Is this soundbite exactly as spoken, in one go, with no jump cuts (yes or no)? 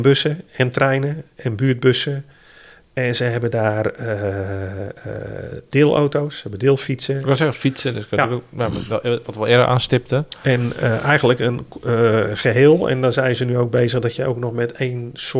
yes